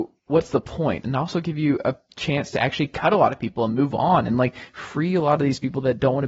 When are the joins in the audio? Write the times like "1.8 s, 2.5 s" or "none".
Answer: 1.0 s